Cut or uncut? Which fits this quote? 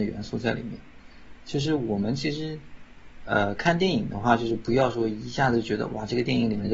uncut